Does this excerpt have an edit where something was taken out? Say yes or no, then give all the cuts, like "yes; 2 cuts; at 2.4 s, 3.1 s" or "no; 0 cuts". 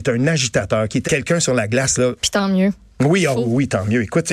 yes; 2 cuts; at 1.0 s, 2.2 s